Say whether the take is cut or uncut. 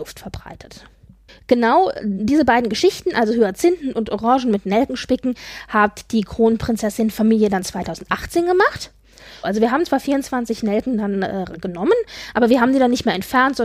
cut